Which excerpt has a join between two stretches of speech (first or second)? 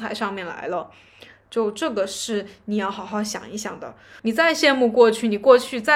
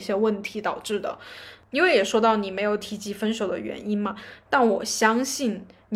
first